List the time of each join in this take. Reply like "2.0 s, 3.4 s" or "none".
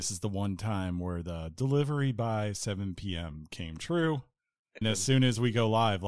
4.8 s